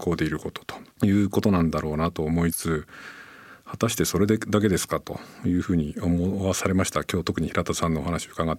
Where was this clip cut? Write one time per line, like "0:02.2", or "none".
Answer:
0:00.9
0:02.5